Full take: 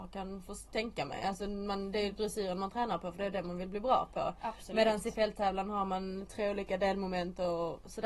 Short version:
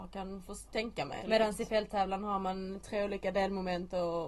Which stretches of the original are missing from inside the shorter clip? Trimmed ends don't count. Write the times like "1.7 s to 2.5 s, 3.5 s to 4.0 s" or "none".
1.2 s to 4.7 s